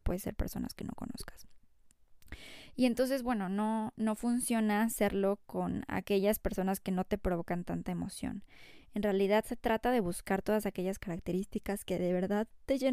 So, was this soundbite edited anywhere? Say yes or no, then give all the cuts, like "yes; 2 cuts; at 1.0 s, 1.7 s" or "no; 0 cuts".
no; 0 cuts